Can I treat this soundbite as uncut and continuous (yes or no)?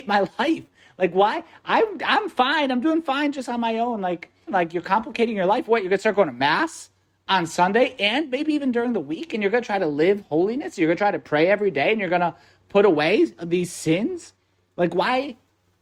no